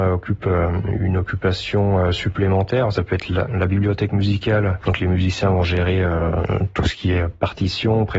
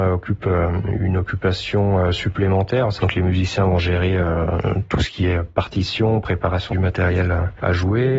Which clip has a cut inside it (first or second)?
second